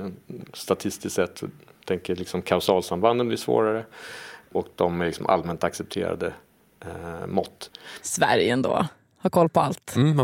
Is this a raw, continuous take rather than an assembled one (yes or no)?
yes